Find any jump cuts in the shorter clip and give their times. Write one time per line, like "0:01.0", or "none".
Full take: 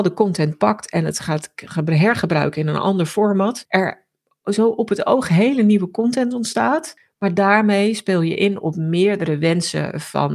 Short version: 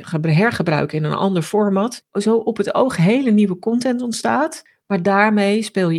0:02.0